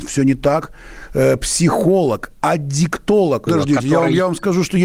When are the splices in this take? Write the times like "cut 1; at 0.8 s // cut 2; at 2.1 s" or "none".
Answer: cut 1; at 3.5 s